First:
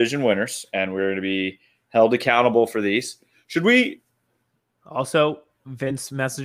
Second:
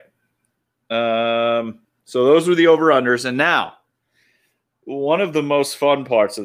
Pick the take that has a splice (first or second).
first